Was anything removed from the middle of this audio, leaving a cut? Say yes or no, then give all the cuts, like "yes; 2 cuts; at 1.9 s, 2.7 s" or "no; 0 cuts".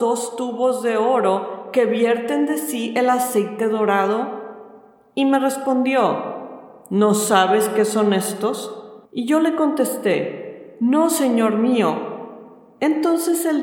yes; 1 cut; at 9.1 s